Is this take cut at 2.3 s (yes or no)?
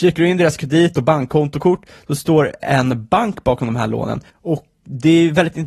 no